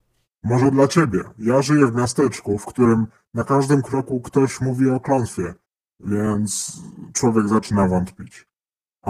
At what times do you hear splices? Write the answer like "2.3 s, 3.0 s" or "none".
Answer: none